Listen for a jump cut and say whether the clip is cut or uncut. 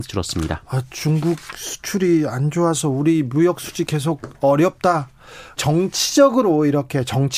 cut